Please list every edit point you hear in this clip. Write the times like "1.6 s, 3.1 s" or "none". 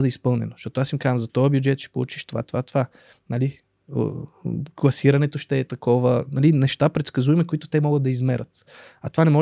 none